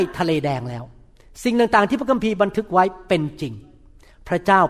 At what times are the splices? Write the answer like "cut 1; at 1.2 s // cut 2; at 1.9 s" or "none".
none